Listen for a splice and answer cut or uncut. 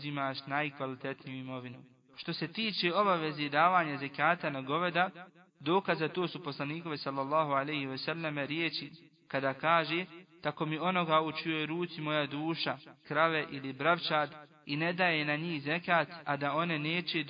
cut